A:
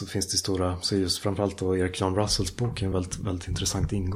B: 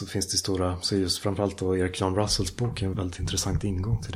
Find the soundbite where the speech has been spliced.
B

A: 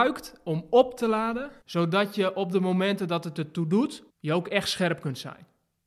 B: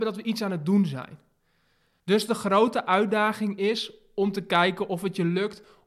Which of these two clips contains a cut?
A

